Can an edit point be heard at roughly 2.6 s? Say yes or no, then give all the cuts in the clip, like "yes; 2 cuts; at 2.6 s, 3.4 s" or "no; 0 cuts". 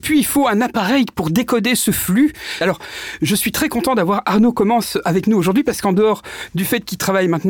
yes; 1 cut; at 2.6 s